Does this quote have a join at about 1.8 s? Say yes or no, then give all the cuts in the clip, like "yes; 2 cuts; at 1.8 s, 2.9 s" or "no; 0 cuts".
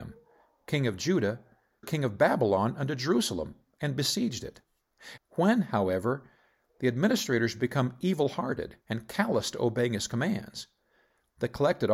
yes; 3 cuts; at 1.8 s, 5.2 s, 8.8 s